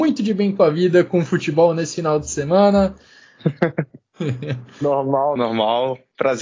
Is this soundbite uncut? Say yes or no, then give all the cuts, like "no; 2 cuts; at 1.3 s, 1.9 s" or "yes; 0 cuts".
no; 2 cuts; at 3.4 s, 5.4 s